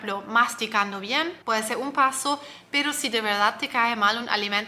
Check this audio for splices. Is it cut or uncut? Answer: cut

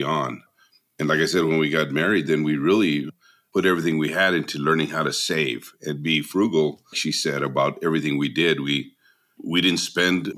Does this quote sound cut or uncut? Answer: cut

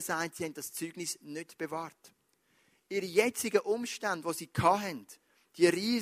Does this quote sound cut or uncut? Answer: uncut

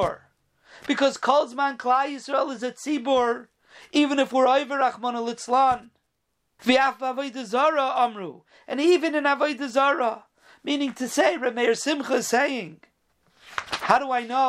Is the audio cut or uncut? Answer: cut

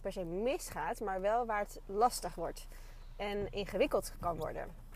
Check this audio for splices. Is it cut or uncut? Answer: uncut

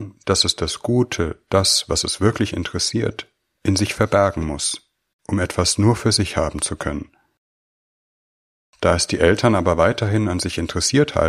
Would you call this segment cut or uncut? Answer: uncut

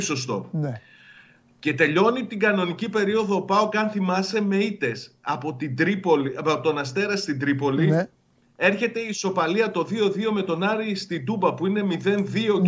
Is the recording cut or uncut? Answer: uncut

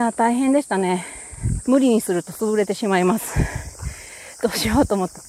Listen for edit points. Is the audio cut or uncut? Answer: cut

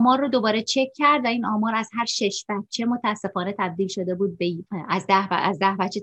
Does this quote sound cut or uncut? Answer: cut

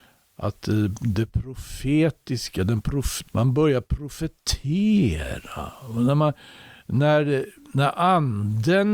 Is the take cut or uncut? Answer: cut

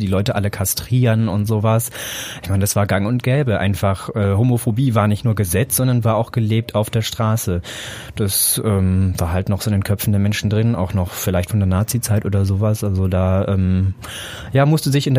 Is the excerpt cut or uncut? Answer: uncut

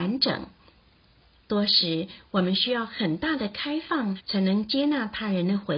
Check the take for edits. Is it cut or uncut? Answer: cut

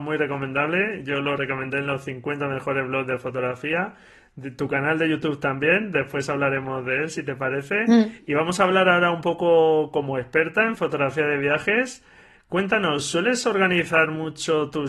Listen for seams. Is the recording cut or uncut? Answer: uncut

